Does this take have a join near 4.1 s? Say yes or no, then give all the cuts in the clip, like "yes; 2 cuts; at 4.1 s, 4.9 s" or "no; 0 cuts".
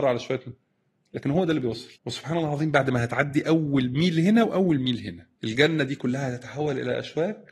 no; 2 cuts; at 2.0 s, 5.4 s